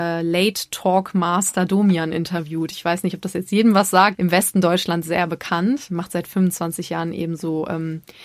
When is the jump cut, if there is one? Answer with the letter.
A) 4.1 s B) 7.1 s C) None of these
A